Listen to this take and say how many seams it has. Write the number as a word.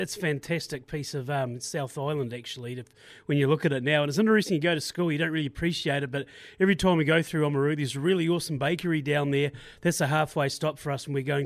zero